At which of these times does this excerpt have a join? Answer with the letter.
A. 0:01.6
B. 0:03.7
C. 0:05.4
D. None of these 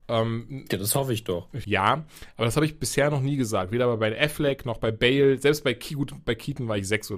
A